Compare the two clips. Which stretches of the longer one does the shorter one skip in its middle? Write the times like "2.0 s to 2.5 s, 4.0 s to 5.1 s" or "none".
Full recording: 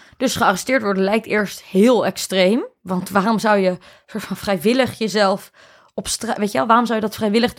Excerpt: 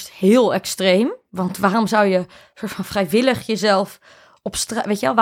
none